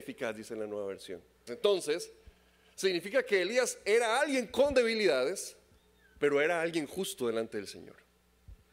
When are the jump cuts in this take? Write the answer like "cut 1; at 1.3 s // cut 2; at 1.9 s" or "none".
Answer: cut 1; at 1.5 s